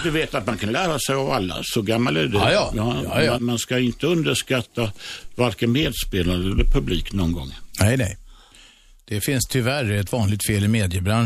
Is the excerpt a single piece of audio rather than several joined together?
no; 1 cut; at 3.4 s

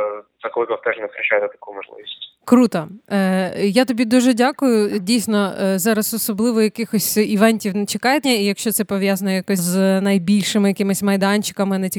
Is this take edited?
yes; 2 cuts; at 8.2 s, 9.6 s

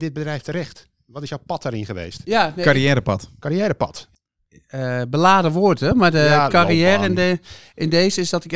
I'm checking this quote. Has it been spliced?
no; 0 cuts

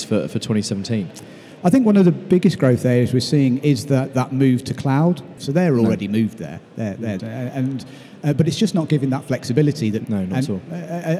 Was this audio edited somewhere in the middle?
yes; 3 cuts; at 5.4 s, 7.2 s, 10.0 s

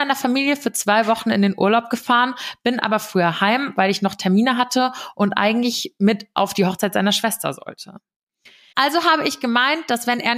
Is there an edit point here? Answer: yes; 1 cut; at 8.7 s

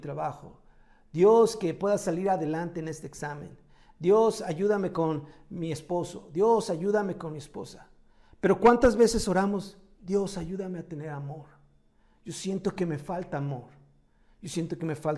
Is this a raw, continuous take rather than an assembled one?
yes; 0 cuts

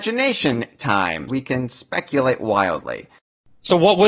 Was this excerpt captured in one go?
no; 1 cut; at 1.3 s

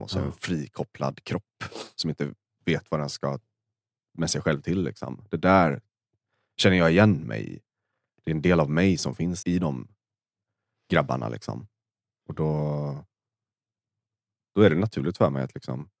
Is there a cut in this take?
yes; 1 cut; at 9.4 s

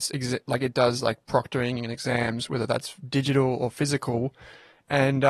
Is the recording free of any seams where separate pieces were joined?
yes; 0 cuts

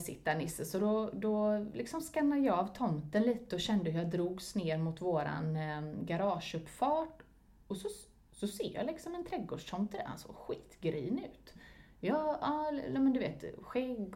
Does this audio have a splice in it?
no; 0 cuts

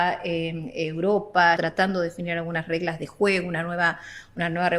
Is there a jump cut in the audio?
yes; 1 cut; at 1.6 s

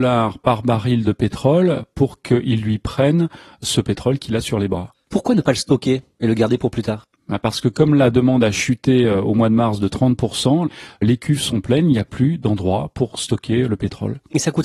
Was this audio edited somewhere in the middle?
no; 0 cuts

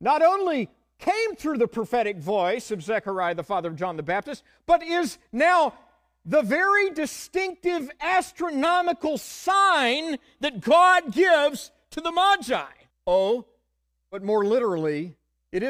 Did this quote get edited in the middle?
yes; 1 cut; at 12.9 s

